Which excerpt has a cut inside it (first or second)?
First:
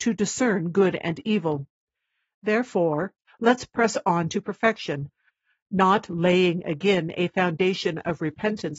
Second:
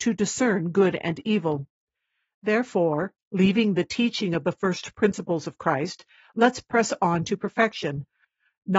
first